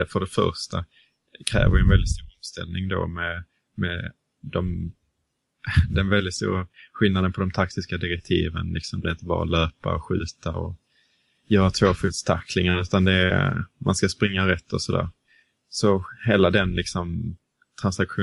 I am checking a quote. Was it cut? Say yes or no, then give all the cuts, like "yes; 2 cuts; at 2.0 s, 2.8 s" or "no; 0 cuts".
no; 0 cuts